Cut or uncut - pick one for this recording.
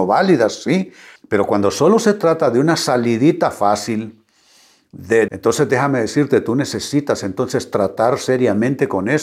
cut